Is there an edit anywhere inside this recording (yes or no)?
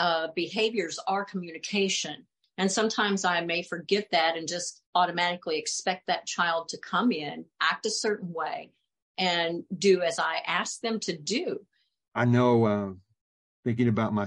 yes